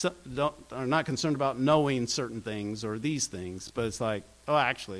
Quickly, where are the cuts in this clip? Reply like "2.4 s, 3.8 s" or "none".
none